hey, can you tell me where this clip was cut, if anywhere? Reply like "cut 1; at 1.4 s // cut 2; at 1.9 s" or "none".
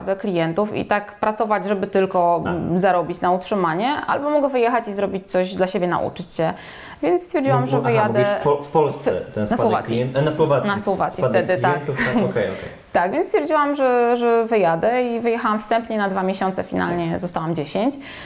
none